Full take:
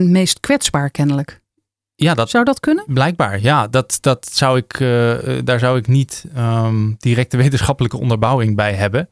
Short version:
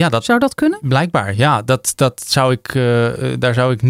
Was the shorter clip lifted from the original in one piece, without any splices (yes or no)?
yes